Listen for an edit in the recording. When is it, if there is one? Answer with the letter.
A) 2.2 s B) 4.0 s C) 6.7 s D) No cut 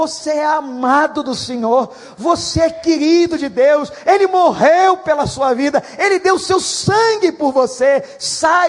D